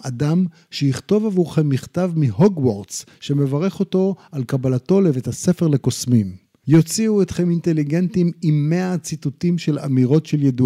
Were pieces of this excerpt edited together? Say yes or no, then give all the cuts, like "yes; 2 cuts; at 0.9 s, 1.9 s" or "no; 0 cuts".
yes; 1 cut; at 6.6 s